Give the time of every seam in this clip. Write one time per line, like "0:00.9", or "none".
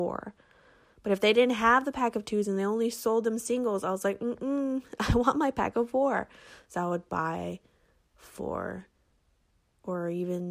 none

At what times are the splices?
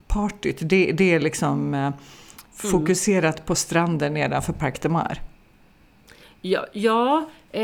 none

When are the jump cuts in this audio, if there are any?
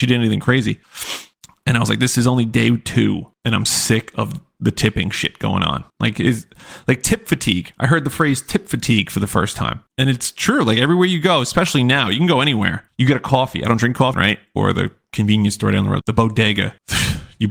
0:14.1
0:16.0

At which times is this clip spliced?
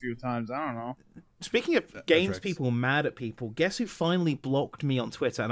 none

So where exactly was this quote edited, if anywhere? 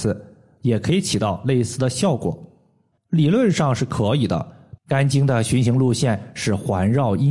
0:03.0
0:04.8

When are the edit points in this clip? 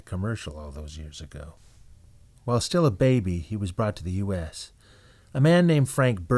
0:02.3

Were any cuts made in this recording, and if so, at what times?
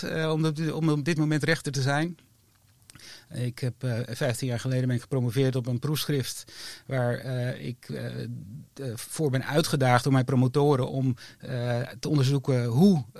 none

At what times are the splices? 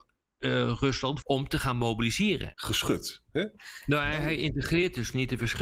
0:01.2
0:02.5

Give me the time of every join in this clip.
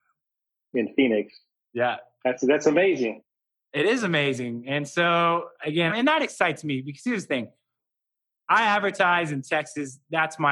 0:05.9

